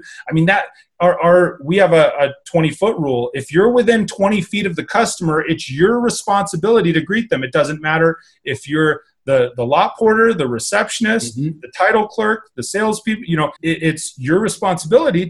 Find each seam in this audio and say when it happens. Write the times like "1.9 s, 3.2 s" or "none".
13.6 s